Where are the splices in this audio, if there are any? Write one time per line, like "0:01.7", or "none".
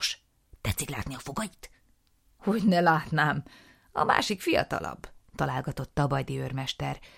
none

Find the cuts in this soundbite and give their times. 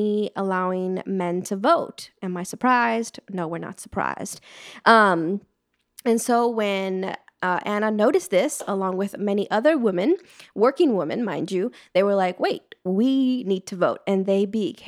none

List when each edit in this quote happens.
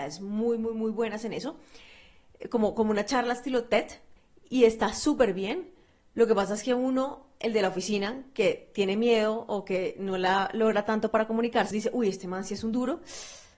0:11.7

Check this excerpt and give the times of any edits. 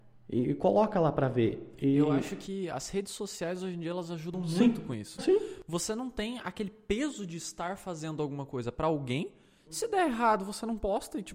0:05.2

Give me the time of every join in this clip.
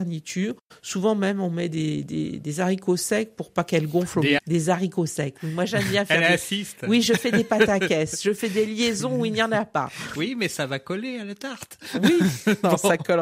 0:04.4

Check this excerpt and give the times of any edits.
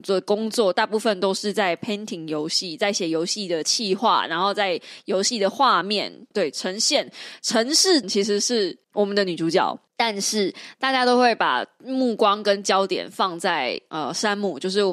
0:06.3
0:08.0

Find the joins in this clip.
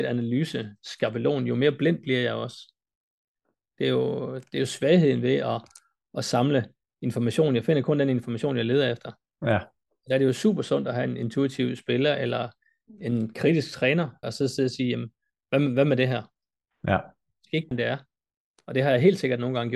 0:14.2
0:17.7

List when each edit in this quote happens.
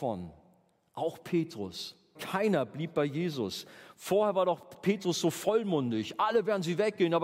0:02.1

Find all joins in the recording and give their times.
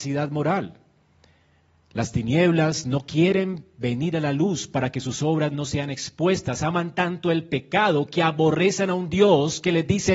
none

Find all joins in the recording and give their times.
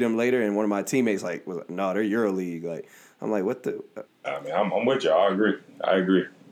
0:04.1

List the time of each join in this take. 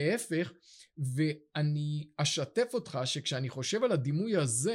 none

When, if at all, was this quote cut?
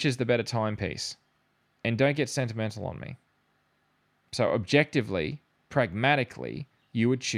none

